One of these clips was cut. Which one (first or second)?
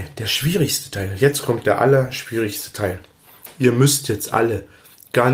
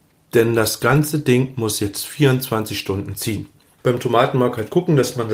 second